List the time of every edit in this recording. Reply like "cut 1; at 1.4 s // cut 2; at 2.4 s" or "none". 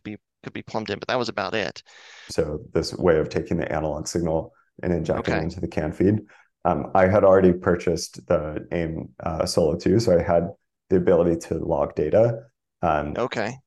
cut 1; at 2.3 s